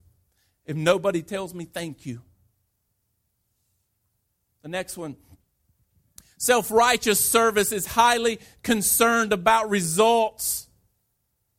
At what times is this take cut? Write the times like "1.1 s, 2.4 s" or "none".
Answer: none